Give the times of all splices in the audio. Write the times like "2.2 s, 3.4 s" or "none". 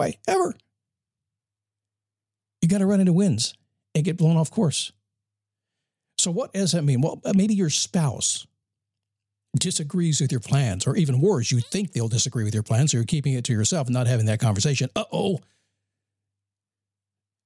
none

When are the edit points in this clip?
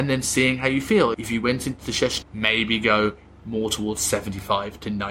1.1 s, 2.2 s

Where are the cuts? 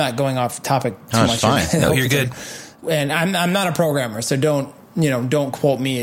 2.8 s

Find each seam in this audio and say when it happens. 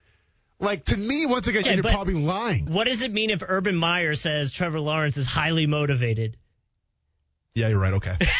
1.6 s, 2.7 s

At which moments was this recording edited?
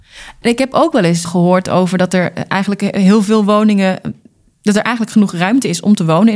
1.3 s

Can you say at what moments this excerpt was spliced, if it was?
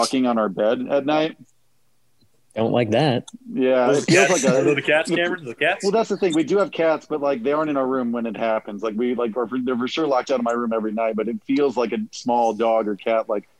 none

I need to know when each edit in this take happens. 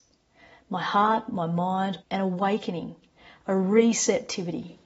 2.0 s

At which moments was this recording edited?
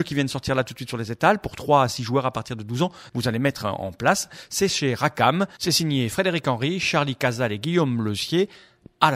3.1 s

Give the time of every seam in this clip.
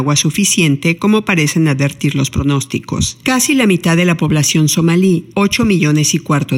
3.2 s, 5.3 s

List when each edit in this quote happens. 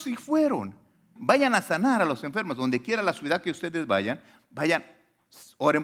1.2 s

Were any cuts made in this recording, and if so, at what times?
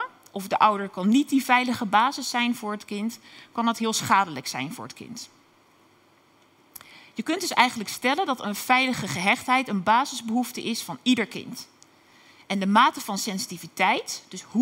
none

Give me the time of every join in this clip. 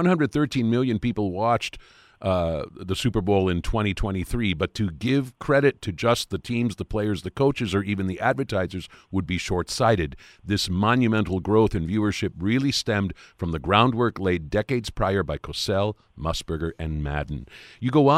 none

